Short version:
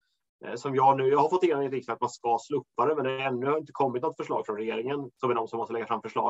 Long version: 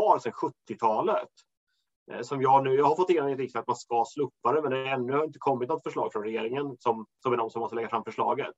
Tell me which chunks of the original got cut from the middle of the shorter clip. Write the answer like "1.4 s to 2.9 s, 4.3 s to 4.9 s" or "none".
6.8 s to 7.1 s